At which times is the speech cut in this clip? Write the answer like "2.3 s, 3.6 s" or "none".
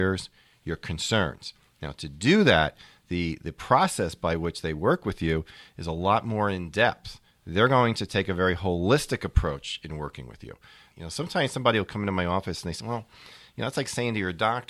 10.9 s, 12.8 s